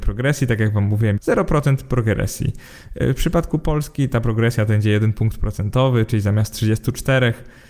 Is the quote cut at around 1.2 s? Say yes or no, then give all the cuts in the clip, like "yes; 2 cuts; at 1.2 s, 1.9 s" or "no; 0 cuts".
yes; 1 cut; at 1.2 s